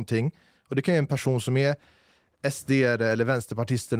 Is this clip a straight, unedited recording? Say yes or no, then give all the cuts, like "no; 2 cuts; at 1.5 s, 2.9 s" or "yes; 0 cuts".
yes; 0 cuts